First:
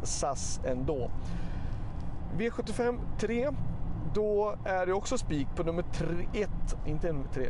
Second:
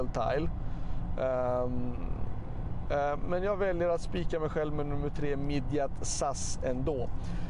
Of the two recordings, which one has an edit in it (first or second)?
second